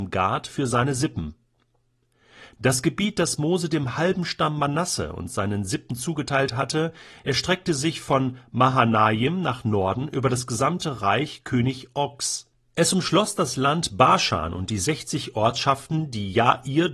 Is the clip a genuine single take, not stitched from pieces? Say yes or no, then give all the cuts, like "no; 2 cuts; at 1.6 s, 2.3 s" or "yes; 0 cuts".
yes; 0 cuts